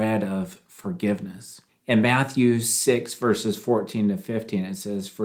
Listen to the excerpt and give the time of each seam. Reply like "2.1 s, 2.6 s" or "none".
1.7 s